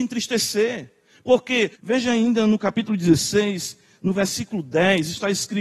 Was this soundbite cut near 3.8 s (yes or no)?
no